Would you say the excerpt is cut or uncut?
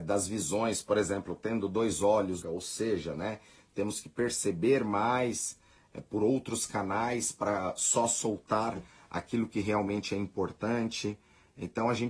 cut